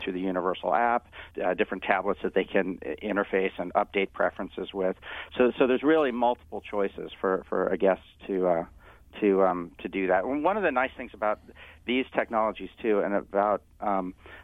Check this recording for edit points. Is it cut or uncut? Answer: cut